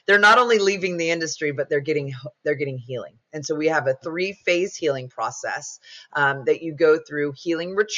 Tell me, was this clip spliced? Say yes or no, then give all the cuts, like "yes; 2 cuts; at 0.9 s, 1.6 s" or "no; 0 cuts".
no; 0 cuts